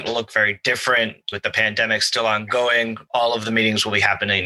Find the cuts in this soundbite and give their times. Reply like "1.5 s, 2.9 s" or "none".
1.3 s